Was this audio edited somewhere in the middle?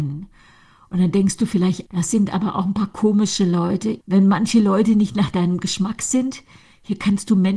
yes; 2 cuts; at 1.9 s, 4.0 s

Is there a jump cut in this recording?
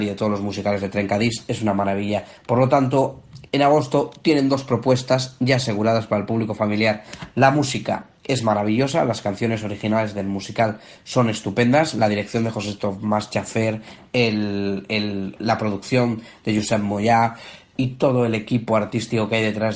yes; 2 cuts; at 3.5 s, 7.3 s

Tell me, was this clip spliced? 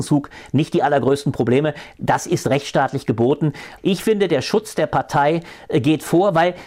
yes; 1 cut; at 3.8 s

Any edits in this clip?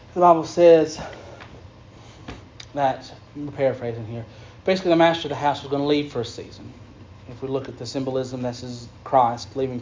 no; 0 cuts

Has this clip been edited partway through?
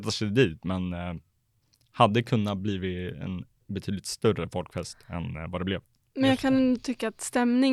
no; 0 cuts

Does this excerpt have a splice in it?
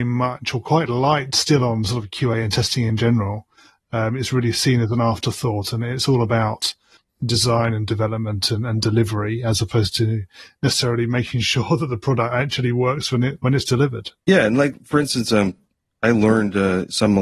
yes; 1 cut; at 14.2 s

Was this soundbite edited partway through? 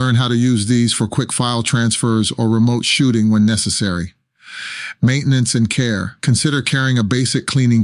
yes; 1 cut; at 6.2 s

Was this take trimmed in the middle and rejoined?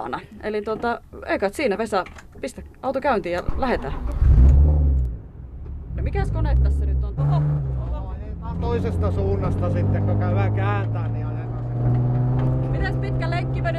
yes; 2 cuts; at 5.9 s, 7.2 s

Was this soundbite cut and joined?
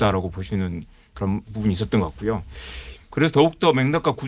yes; 2 cuts; at 1.4 s, 3.0 s

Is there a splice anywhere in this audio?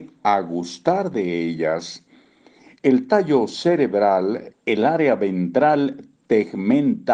yes; 2 cuts; at 2.8 s, 4.5 s

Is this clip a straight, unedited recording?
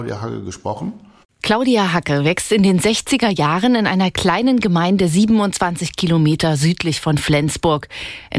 no; 1 cut; at 1.2 s

